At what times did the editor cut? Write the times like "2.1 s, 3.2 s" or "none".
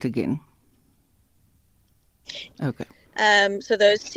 2.5 s